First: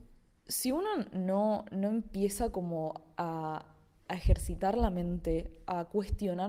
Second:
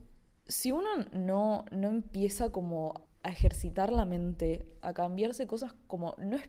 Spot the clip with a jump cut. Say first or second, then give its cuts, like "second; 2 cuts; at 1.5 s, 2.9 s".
second; 2 cuts; at 3.1 s, 4.8 s